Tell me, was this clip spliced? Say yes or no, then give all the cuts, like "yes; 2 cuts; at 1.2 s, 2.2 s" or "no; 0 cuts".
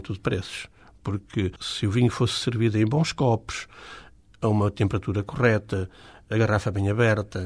yes; 1 cut; at 1.6 s